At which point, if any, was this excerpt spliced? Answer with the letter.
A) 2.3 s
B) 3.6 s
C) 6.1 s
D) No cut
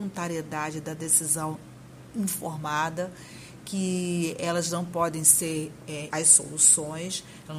C